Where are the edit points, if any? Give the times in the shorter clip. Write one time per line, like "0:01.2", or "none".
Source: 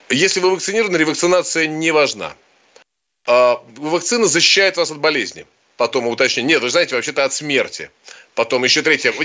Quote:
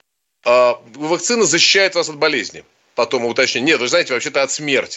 none